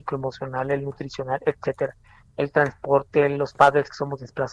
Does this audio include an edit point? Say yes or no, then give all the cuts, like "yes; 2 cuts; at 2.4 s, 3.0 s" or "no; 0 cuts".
no; 0 cuts